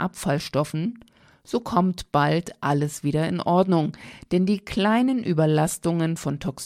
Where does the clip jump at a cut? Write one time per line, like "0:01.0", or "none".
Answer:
none

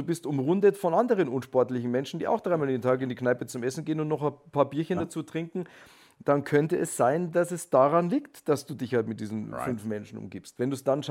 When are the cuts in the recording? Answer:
none

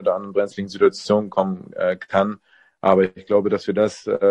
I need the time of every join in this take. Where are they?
none

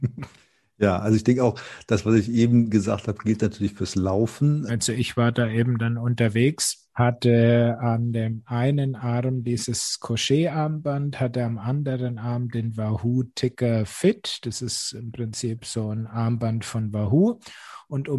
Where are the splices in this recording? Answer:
0:04.7

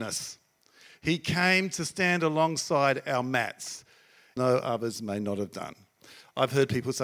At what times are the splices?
0:04.4

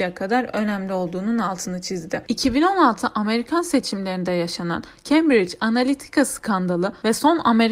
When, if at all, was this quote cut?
0:02.3

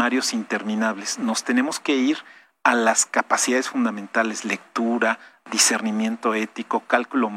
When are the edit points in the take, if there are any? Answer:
none

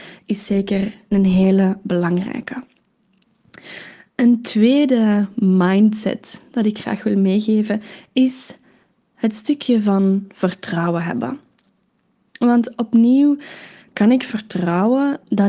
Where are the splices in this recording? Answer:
0:13.8

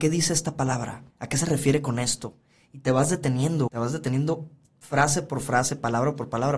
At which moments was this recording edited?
0:01.1
0:03.7

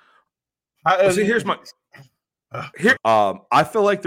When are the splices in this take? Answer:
0:03.0

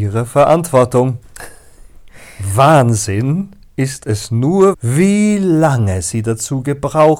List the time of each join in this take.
0:04.7

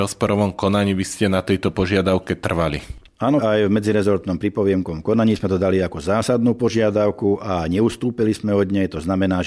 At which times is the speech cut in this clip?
0:03.4

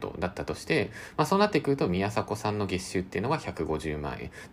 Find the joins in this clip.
none

